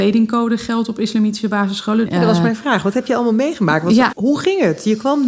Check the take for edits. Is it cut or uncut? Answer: cut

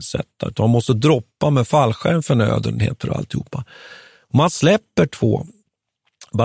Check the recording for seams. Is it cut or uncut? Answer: uncut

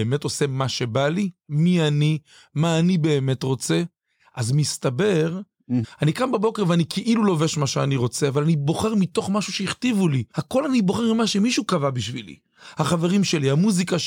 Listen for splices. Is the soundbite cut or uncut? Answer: cut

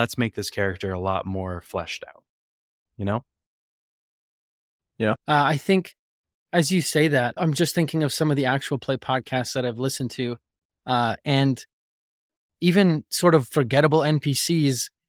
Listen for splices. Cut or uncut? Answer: cut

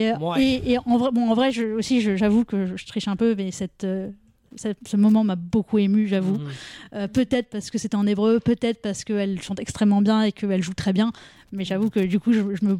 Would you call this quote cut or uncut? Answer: uncut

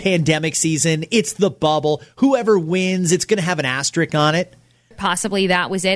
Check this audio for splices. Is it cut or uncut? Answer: cut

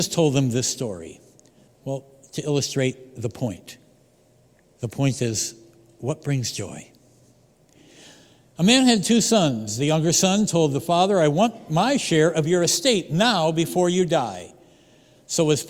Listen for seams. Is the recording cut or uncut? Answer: cut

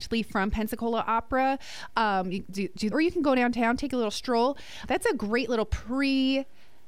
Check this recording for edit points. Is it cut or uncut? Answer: cut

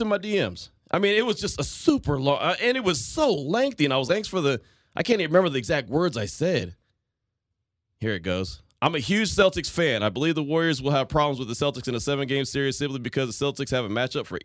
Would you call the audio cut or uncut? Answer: cut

